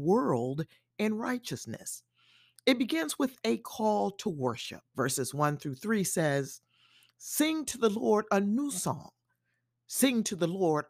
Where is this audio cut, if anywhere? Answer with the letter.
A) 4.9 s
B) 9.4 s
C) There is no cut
A